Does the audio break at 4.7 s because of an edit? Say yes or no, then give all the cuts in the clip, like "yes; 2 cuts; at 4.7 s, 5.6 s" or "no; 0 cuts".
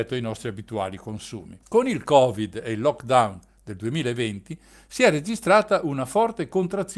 no; 1 cut; at 1.6 s